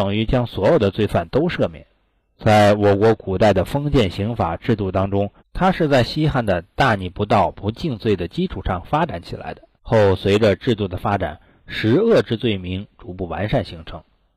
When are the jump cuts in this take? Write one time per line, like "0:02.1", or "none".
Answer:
0:05.4
0:09.8